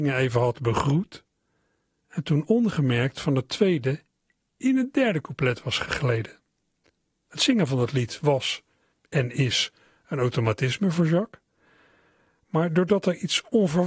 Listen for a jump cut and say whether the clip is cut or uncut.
uncut